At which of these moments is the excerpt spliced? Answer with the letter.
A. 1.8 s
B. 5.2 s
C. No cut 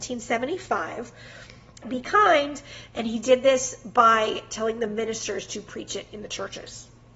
A